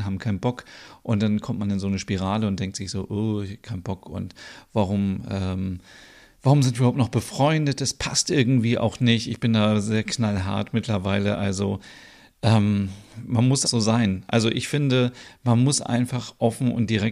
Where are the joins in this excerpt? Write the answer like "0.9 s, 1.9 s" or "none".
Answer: 13.6 s